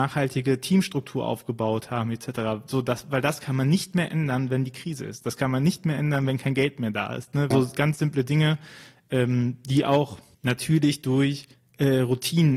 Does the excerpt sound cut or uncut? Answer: cut